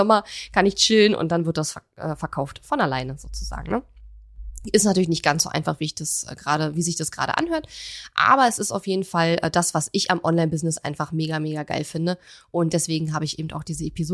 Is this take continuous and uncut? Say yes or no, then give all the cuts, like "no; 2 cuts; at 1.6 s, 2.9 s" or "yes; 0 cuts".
yes; 0 cuts